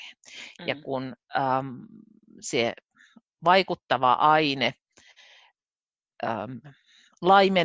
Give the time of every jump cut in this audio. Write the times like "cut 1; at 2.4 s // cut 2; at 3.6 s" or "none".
none